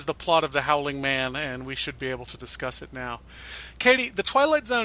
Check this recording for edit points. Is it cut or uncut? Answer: uncut